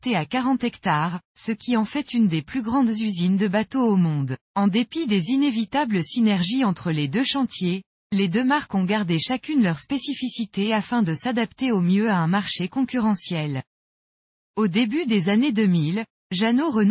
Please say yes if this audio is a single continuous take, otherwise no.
no